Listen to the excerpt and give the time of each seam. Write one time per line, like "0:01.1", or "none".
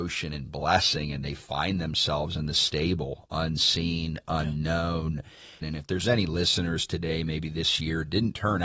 0:05.6